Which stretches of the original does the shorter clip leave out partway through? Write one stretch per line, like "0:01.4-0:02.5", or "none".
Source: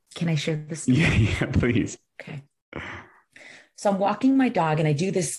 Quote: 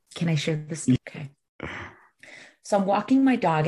0:01.0-0:02.1